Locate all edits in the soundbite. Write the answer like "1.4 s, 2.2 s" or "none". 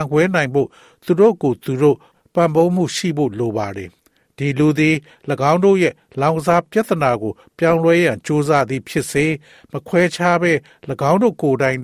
4.0 s